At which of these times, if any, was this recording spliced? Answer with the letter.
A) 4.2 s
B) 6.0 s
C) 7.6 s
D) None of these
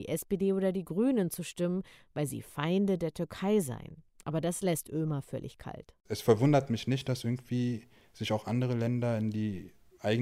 D